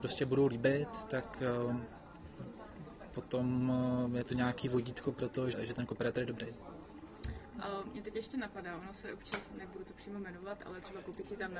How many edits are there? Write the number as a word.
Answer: two